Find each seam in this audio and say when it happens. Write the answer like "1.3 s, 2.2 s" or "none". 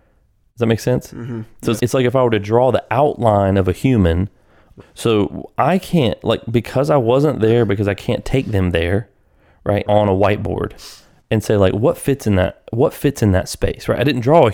1.8 s, 4.8 s, 9.9 s